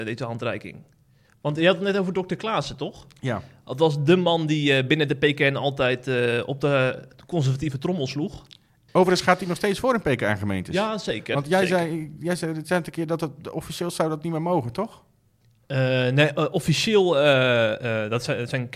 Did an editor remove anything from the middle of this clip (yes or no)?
yes